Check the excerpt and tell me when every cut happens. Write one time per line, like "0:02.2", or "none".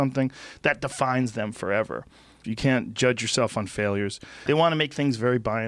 0:02.4
0:04.5